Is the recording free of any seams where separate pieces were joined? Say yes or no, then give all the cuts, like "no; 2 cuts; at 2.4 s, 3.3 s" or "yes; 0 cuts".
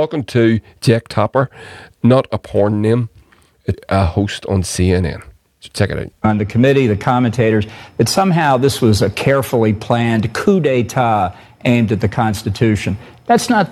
no; 2 cuts; at 3.7 s, 6.1 s